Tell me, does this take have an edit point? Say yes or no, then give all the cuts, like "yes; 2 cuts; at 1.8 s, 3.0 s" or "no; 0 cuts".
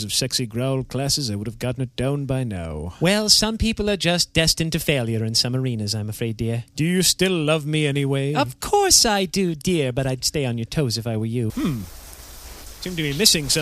yes; 1 cut; at 11.5 s